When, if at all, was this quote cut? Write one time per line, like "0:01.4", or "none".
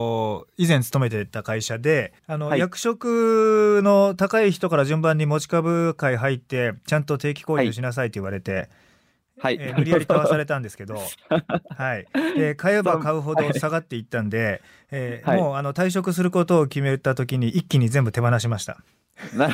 0:02.2